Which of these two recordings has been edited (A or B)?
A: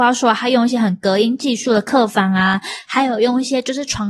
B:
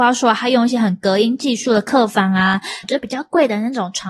B